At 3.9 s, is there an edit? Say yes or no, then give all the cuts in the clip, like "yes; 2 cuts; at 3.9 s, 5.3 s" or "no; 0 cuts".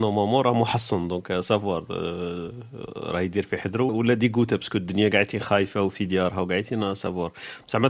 yes; 1 cut; at 3.9 s